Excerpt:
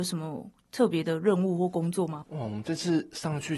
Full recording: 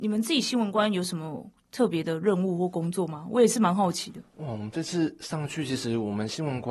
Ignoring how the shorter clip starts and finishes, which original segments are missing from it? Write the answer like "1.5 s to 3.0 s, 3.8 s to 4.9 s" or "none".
3.2 s to 4.3 s